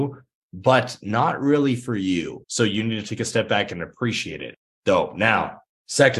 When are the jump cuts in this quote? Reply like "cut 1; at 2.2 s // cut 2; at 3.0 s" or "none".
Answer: cut 1; at 2.4 s // cut 2; at 4.7 s

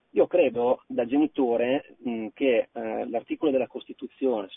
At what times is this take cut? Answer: none

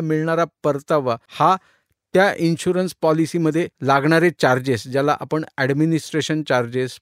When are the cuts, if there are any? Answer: cut 1; at 1.3 s // cut 2; at 3.7 s

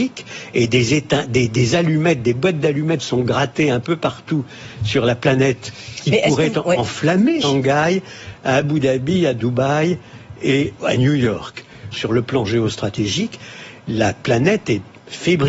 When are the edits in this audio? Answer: cut 1; at 7.4 s // cut 2; at 11.9 s

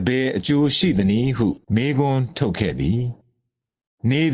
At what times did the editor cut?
cut 1; at 1.6 s

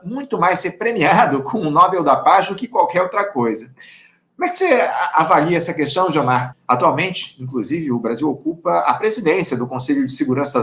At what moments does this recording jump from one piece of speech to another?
cut 1; at 6.5 s

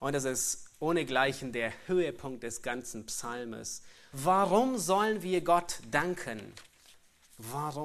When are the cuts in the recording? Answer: cut 1; at 4.1 s

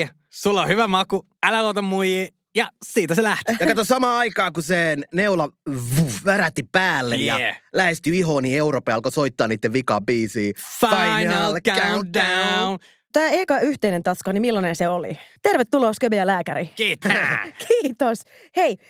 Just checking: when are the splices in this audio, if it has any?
cut 1; at 15.4 s // cut 2; at 17.0 s

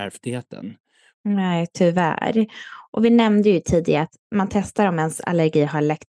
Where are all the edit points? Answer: cut 1; at 1.1 s

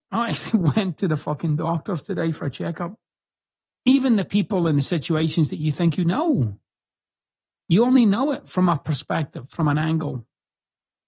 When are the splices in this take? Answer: cut 1; at 3.7 s

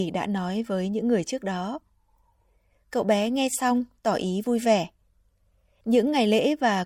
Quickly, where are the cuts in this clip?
none

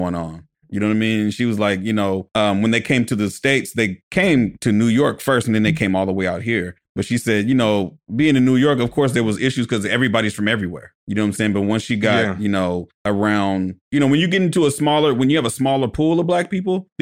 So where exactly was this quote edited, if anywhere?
none

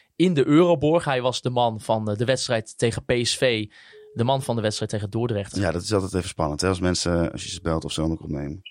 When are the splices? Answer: cut 1; at 5.5 s

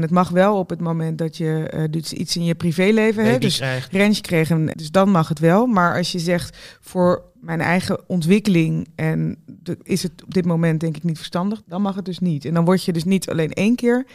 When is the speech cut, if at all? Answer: cut 1; at 4.7 s // cut 2; at 11.6 s

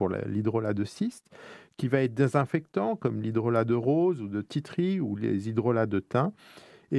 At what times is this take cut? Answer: none

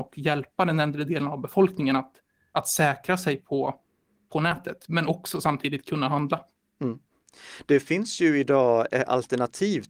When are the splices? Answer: none

